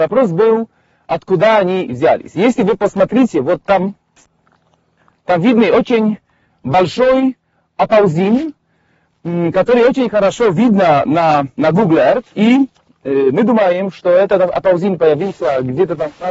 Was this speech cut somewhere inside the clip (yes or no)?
yes